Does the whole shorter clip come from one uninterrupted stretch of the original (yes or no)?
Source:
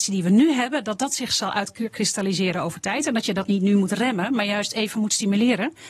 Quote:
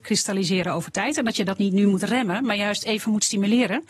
yes